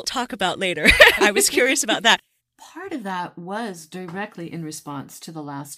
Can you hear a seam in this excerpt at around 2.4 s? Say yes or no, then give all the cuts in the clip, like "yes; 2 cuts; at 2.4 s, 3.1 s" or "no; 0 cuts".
yes; 2 cuts; at 1.2 s, 2.4 s